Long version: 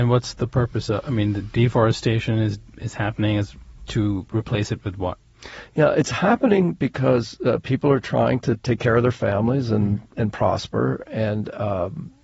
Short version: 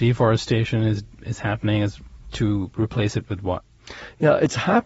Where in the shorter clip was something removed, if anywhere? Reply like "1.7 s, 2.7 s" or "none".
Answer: none